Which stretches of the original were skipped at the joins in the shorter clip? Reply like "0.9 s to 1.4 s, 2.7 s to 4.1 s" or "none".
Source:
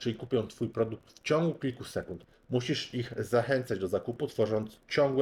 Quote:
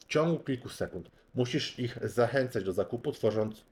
none